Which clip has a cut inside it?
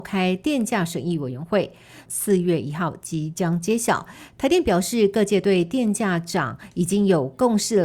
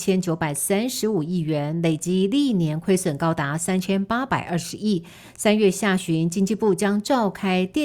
first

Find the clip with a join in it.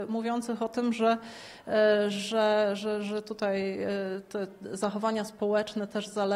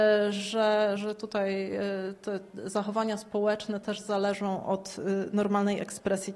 second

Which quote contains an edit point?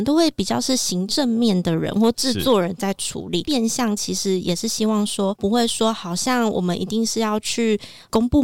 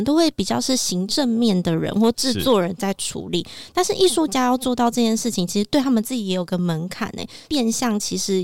first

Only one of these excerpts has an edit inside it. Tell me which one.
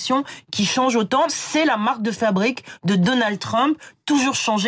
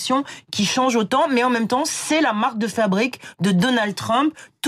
first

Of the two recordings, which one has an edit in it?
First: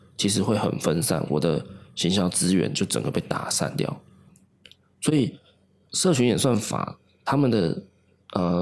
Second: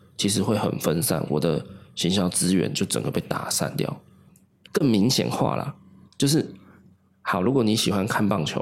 second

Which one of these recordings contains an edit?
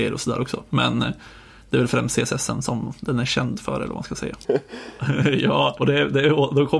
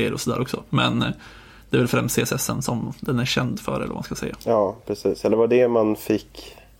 first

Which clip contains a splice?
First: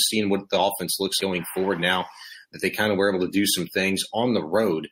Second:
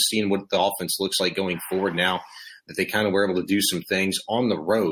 first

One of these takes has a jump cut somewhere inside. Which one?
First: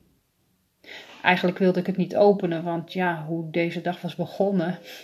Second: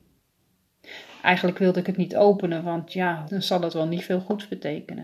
second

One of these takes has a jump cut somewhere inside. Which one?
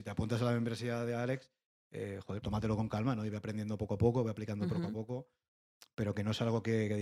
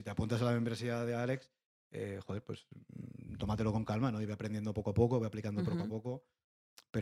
first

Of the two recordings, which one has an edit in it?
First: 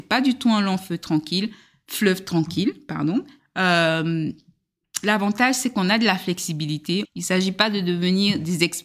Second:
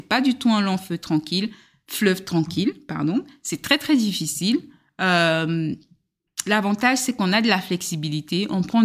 first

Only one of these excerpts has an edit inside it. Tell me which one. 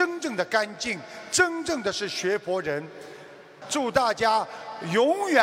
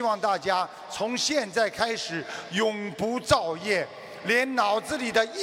first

